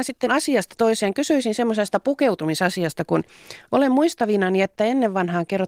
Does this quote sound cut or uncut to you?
uncut